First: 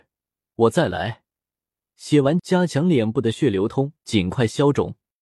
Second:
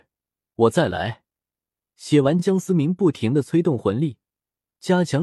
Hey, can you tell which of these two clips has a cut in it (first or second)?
first